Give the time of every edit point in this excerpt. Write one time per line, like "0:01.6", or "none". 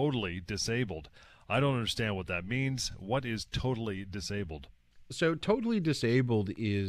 none

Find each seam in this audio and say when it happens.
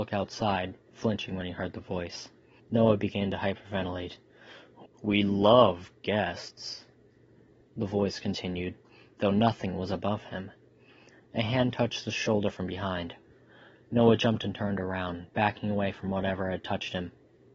0:02.6
0:04.9

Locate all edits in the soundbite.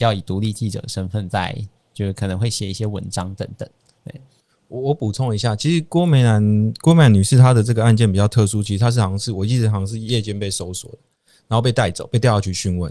none

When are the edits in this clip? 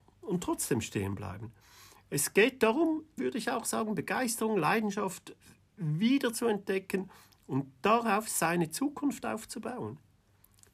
0:03.2

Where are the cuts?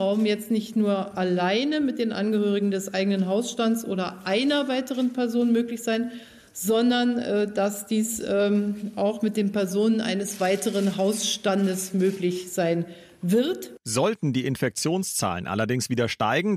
none

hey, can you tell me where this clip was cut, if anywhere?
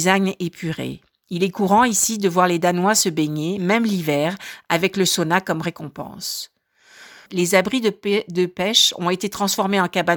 0:07.3

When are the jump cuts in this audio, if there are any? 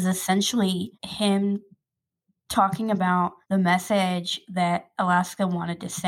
0:00.9
0:03.4

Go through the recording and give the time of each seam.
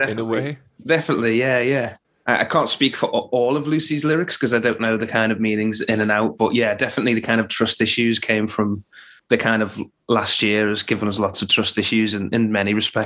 0:09.2

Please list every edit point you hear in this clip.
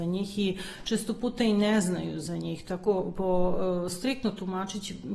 none

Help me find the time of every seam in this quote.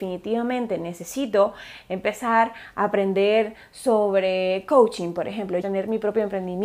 0:05.6

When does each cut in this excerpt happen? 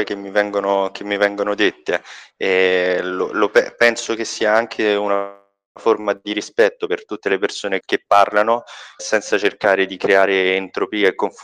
0:07.8
0:09.0

